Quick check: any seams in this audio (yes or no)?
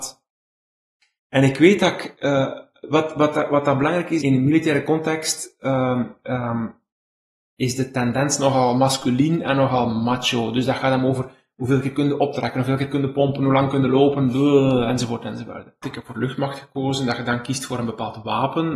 yes